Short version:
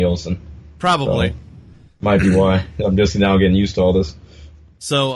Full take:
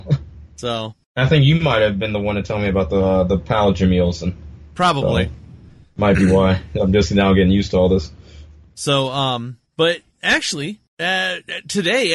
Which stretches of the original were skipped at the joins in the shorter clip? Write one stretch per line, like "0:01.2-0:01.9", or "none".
none